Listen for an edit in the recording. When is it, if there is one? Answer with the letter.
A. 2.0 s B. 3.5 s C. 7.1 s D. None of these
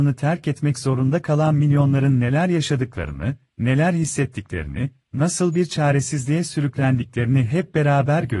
D